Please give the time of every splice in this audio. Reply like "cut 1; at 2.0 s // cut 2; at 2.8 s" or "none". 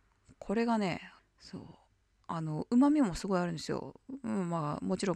cut 1; at 1.2 s